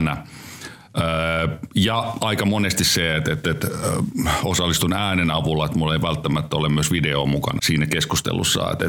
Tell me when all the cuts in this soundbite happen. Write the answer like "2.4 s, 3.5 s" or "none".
7.6 s